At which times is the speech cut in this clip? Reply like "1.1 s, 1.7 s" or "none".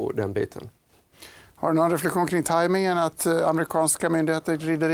none